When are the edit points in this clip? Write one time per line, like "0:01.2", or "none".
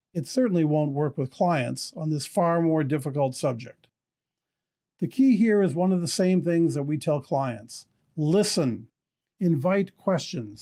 none